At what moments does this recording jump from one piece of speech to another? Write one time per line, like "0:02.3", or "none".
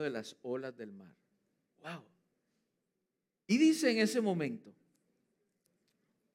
none